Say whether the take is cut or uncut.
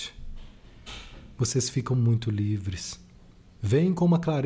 cut